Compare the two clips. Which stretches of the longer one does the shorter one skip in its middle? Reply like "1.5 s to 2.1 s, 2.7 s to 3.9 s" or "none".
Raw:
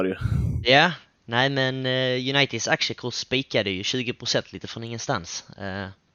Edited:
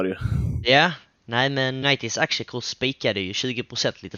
1.8 s to 2.3 s